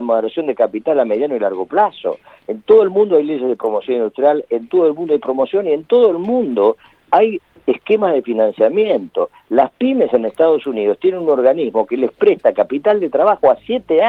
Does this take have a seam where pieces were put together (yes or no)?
no